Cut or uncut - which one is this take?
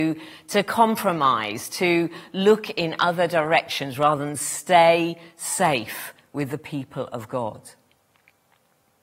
uncut